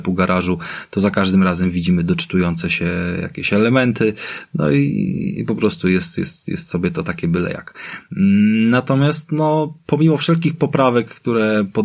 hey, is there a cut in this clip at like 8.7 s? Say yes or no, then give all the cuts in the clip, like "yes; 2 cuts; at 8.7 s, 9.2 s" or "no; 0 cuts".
no; 0 cuts